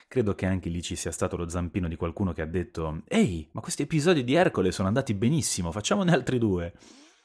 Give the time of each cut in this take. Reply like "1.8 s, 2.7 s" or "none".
none